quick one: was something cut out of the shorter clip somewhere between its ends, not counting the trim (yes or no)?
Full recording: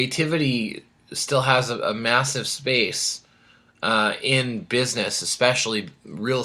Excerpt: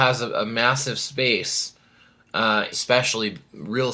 yes